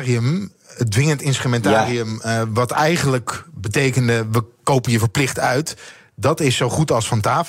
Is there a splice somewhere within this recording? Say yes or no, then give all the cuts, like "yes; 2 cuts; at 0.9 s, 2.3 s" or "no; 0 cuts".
no; 0 cuts